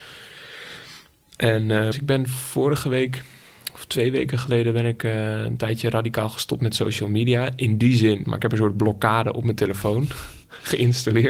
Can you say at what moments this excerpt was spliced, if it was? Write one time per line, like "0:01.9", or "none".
0:01.9
0:08.2

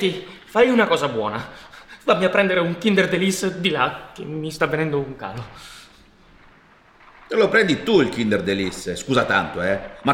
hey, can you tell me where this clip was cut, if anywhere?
none

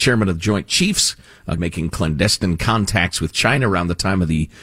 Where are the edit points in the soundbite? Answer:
0:01.6

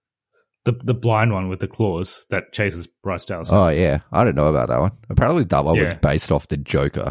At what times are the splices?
none

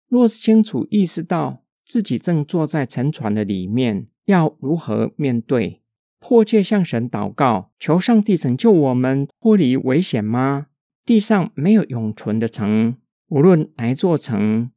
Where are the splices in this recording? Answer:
0:10.9

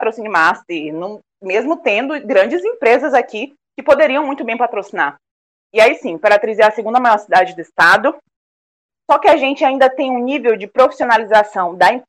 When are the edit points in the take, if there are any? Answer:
0:05.7

